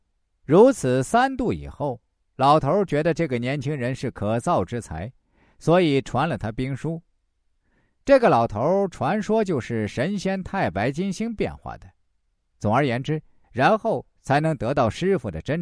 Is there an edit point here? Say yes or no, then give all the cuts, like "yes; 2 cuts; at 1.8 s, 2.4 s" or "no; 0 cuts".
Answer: yes; 1 cut; at 13.4 s